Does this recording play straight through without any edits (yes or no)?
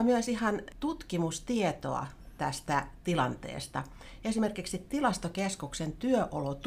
yes